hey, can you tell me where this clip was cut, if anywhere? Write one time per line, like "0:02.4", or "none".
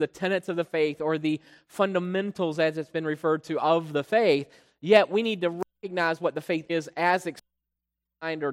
0:06.7